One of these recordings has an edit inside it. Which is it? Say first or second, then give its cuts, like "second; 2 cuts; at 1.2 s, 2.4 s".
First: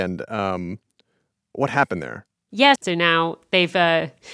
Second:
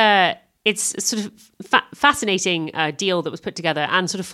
first; 1 cut; at 2.8 s